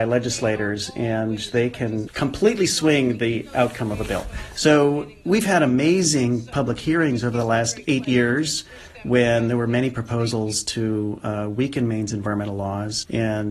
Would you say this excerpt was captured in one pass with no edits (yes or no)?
yes